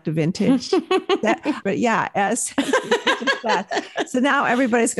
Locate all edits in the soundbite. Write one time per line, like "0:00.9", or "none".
0:01.6